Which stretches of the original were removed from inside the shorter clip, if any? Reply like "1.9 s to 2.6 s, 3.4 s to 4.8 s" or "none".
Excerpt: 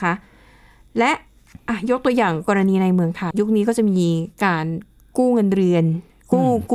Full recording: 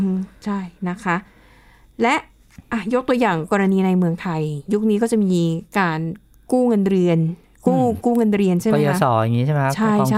4.3 s to 4.6 s